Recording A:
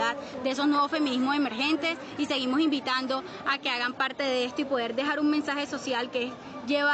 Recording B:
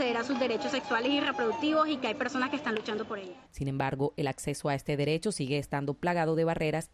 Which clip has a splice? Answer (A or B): B